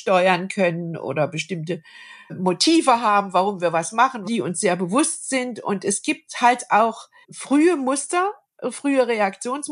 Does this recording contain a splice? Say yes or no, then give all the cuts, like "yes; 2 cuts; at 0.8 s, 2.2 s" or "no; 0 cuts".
yes; 1 cut; at 4.2 s